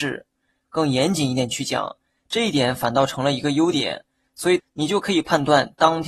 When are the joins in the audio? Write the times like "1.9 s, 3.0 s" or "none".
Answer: 2.2 s, 4.6 s